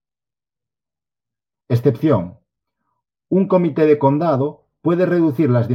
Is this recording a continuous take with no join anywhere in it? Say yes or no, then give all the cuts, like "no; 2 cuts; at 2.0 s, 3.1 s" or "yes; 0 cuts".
no; 1 cut; at 1.6 s